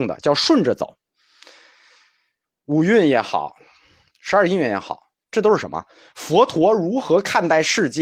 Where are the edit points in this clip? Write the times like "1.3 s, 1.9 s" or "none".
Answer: 5.2 s